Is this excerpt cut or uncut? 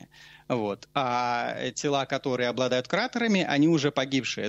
uncut